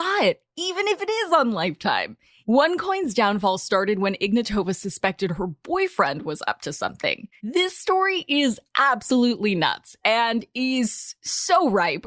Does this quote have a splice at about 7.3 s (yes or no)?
yes